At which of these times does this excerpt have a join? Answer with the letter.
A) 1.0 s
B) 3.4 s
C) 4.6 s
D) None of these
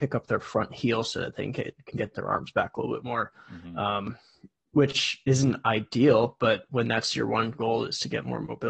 D